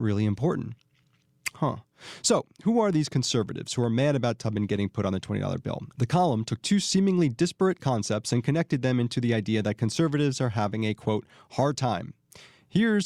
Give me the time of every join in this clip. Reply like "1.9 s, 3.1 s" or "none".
5.9 s